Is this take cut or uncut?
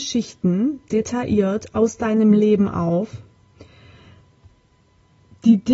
uncut